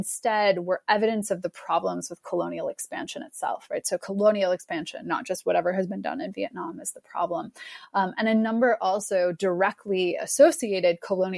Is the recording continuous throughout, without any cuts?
yes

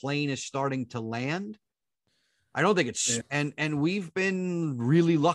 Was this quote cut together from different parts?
yes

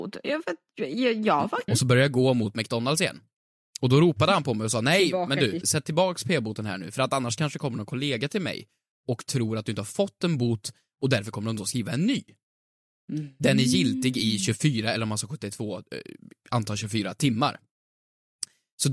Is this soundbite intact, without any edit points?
no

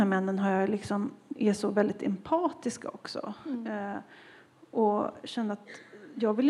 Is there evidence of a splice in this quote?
yes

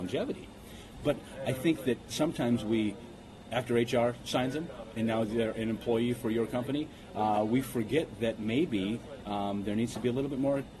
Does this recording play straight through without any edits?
yes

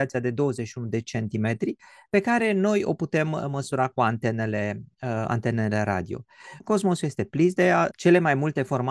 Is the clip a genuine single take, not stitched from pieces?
no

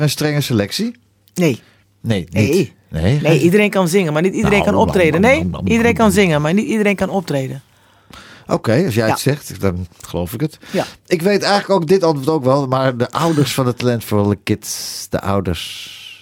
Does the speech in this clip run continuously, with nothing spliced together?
yes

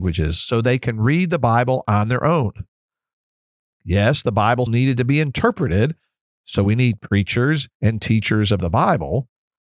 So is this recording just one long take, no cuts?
no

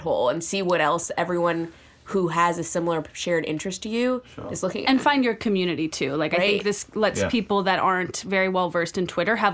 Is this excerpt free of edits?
yes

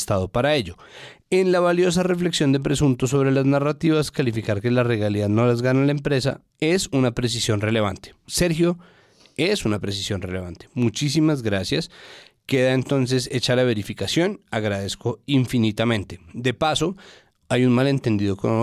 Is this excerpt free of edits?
no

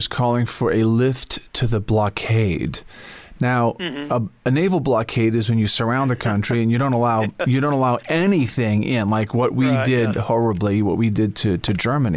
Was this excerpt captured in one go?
yes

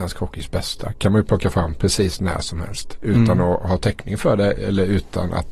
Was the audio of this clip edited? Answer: no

